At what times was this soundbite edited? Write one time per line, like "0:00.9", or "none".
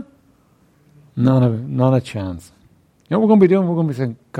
none

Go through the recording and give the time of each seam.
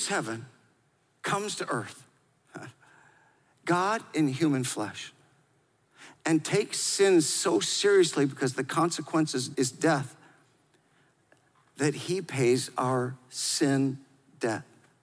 0:09.5

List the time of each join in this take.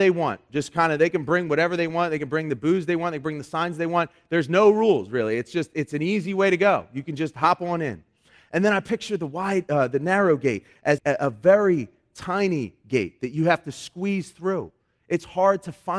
0:11.0

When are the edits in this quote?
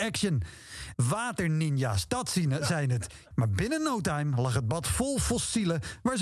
0:00.9
0:03.3

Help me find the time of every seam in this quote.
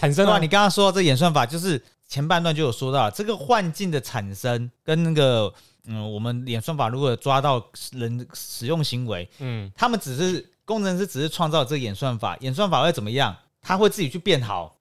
none

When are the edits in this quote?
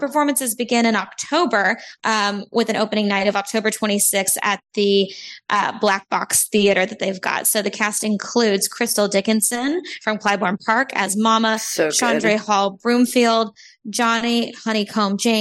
0:02.0

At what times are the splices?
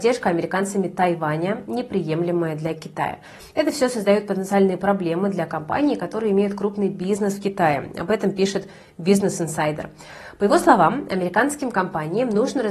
none

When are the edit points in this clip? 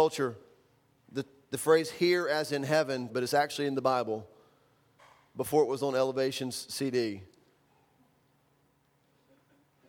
0:03.1

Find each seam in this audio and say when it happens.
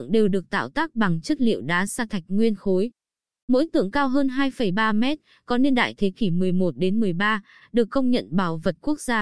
0:07.6

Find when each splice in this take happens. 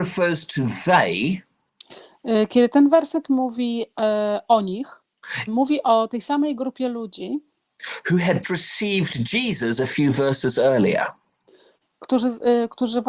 0:05.5
0:08.4

